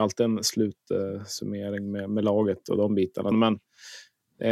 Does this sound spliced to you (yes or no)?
yes